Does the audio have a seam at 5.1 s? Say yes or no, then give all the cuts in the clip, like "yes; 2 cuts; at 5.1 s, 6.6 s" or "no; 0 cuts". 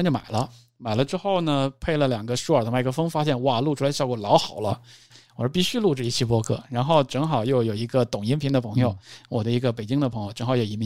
yes; 1 cut; at 5.1 s